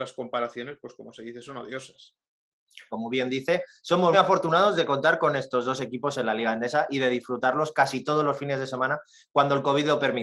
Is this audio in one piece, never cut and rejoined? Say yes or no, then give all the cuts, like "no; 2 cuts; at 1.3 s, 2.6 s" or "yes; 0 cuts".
no; 2 cuts; at 2.9 s, 4.1 s